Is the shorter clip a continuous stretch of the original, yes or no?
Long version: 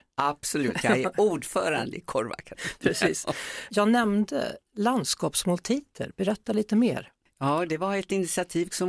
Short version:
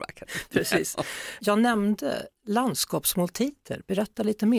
yes